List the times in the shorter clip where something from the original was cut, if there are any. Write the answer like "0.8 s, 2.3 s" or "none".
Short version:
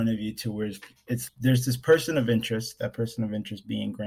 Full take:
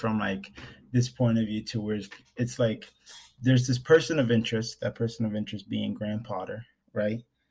1.3 s